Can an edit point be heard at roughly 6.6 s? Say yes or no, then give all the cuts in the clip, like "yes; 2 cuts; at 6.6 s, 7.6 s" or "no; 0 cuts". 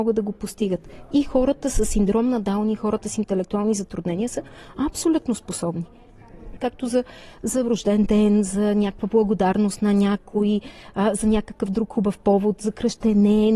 yes; 1 cut; at 6.6 s